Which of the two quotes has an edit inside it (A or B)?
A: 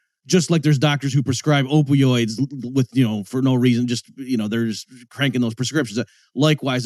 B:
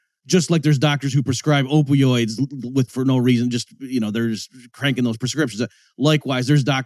B